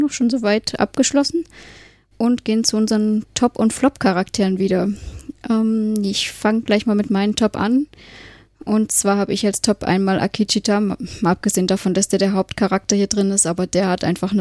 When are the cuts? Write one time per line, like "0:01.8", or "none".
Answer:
none